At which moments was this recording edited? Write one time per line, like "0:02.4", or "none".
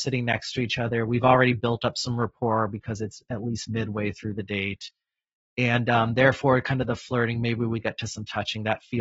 none